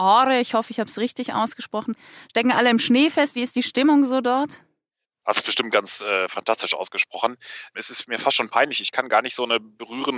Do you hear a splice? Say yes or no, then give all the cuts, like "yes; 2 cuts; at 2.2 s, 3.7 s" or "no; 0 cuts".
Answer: no; 0 cuts